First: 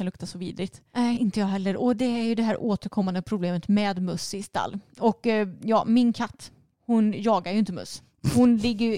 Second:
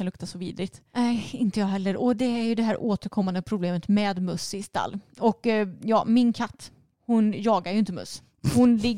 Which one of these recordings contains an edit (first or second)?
first